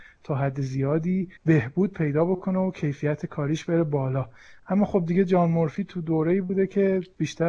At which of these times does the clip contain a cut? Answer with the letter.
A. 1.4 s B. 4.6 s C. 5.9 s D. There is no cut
A